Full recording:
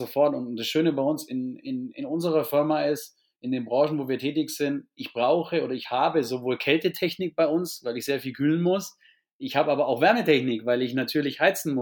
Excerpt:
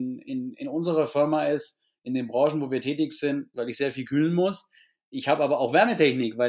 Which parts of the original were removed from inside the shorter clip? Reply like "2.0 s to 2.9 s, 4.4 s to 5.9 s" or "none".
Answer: 4.9 s to 7.8 s